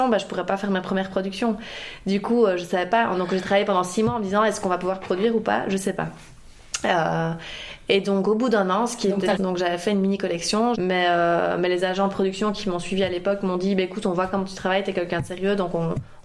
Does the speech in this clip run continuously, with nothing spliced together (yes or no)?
no